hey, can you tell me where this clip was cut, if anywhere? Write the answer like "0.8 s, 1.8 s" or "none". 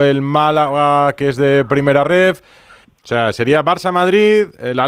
2.8 s